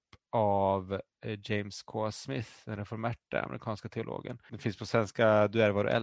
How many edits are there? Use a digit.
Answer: 1